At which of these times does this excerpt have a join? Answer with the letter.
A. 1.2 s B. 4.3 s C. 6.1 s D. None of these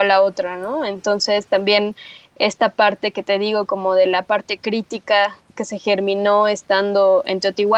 D